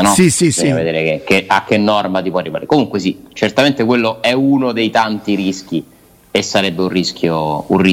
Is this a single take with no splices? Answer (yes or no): yes